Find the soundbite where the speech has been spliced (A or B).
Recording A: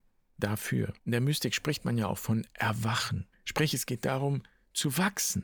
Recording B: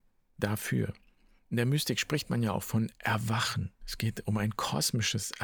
A